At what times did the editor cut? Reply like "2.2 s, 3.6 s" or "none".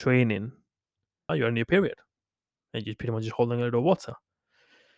1.3 s

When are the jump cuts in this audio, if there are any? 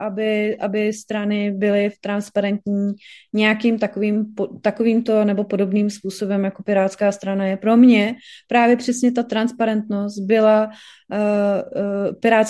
none

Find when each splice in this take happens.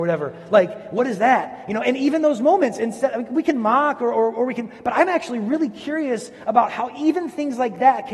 none

